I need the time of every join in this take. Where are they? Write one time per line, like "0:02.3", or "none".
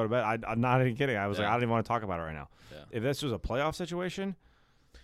none